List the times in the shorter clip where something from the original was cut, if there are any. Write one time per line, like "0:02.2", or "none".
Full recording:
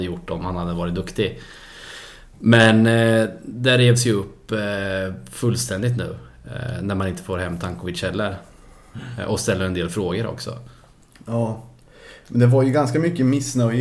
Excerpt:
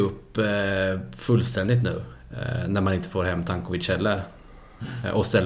none